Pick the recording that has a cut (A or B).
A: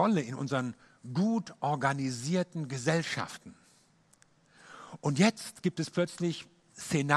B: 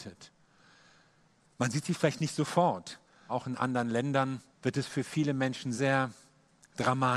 B